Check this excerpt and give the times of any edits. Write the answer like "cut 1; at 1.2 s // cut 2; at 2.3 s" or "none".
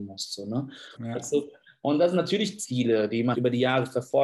cut 1; at 1.0 s // cut 2; at 3.3 s